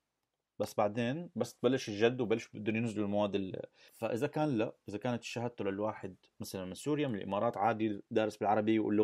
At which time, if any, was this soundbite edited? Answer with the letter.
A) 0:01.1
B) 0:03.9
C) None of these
B